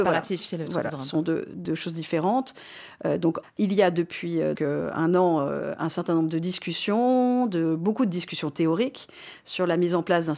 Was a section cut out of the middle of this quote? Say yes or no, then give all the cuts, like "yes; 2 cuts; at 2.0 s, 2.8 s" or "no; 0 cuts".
yes; 2 cuts; at 3.4 s, 4.6 s